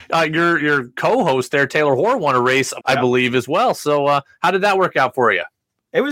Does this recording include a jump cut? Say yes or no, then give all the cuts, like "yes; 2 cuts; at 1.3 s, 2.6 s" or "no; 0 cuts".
yes; 1 cut; at 2.8 s